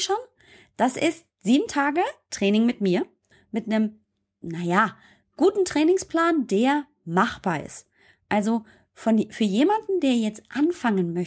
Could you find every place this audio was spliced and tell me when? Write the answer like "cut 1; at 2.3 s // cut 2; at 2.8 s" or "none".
cut 1; at 3.3 s